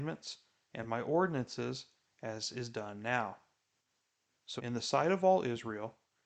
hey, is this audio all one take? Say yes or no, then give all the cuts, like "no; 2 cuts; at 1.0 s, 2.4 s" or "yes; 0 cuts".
no; 1 cut; at 4.6 s